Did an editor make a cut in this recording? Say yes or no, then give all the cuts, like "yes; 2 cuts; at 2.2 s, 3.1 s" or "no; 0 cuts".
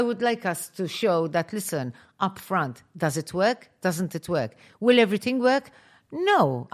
no; 0 cuts